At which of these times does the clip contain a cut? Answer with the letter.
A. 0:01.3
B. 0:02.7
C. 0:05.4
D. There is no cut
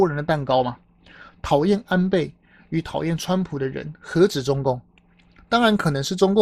D